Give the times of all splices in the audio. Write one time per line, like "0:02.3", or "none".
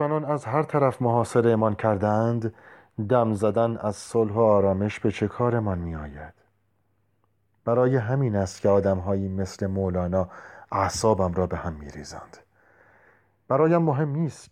none